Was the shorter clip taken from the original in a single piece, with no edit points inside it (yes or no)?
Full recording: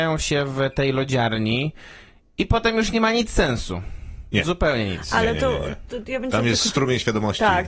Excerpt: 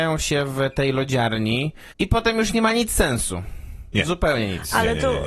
no